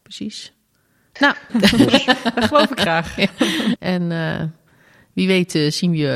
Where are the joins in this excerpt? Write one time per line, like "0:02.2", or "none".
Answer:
0:01.5
0:03.8